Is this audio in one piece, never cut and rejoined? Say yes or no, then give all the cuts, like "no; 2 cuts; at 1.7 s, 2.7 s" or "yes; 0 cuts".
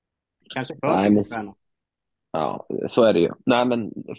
yes; 0 cuts